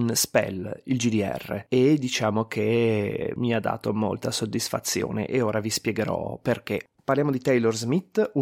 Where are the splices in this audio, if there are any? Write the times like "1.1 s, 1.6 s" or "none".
7.0 s

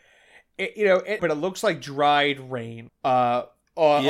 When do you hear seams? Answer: 1.2 s, 2.9 s

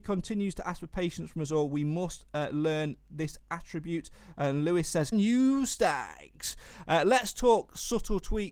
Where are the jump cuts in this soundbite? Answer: 5.1 s

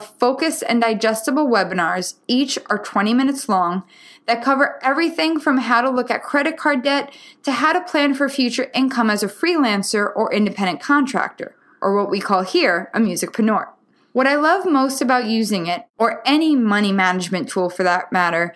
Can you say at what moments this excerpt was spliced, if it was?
none

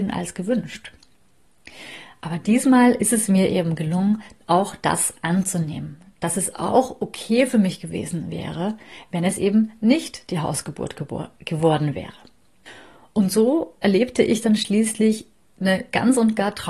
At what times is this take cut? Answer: none

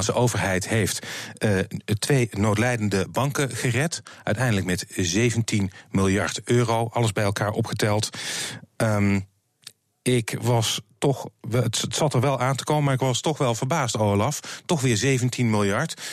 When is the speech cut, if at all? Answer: none

